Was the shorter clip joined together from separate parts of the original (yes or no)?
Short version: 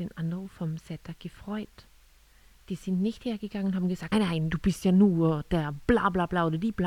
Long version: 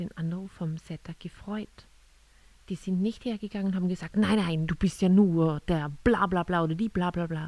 yes